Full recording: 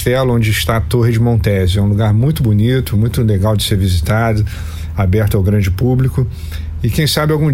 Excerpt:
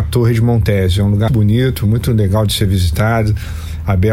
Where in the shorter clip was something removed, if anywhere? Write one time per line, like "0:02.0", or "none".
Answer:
0:01.3